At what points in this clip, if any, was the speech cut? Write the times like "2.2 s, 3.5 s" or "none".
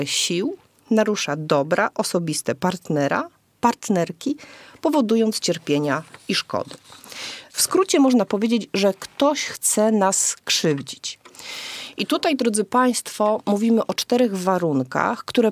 7.4 s

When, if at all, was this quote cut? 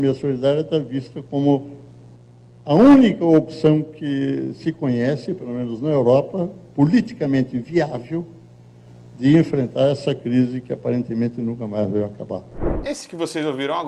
none

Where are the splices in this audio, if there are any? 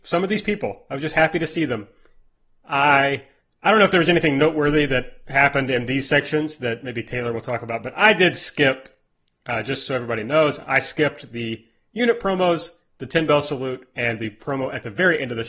none

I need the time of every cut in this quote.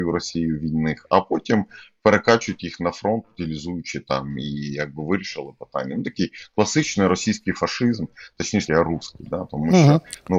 8.7 s

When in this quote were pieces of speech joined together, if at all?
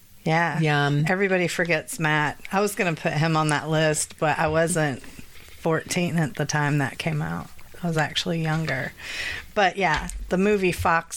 none

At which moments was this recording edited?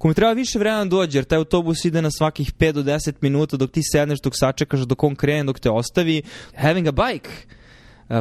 6.5 s

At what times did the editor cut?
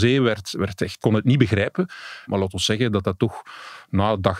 1.0 s, 2.3 s

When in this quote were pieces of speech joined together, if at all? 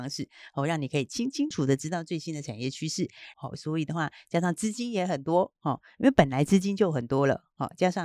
1.5 s, 3.3 s

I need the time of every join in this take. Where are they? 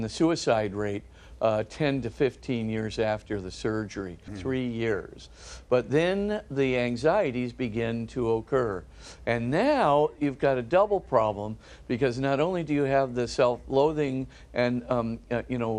4.3 s

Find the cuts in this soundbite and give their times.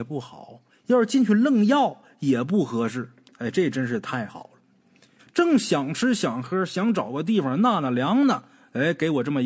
5.2 s

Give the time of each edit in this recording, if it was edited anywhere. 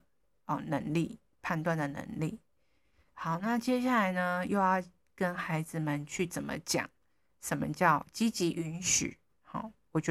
none

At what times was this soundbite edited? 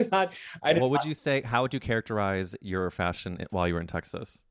none

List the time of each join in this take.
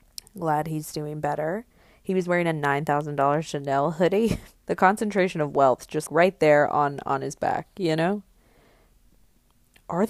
4.6 s, 6.1 s

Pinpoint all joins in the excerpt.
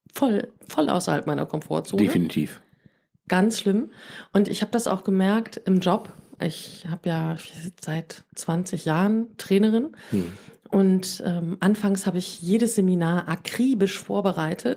none

